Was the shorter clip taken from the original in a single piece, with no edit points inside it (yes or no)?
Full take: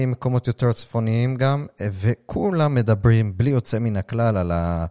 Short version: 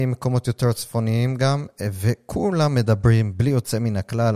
yes